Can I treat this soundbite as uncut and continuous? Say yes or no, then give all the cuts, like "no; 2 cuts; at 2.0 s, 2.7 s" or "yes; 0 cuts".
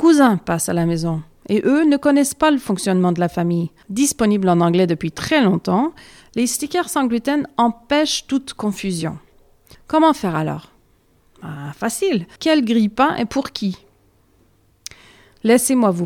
no; 3 cuts; at 3.8 s, 9.7 s, 12.4 s